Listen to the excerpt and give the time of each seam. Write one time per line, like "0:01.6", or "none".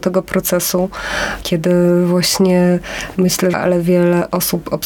0:03.5